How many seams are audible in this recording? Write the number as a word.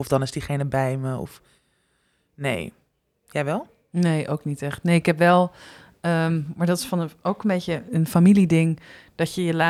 zero